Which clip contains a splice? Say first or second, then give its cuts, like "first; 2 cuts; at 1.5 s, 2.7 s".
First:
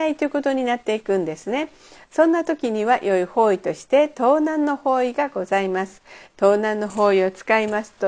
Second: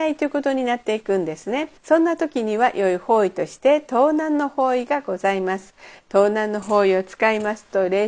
second; 1 cut; at 1.8 s